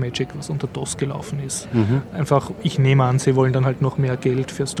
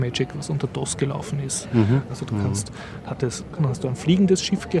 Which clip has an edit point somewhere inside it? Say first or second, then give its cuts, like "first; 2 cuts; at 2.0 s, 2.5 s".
second; 2 cuts; at 2.1 s, 3.6 s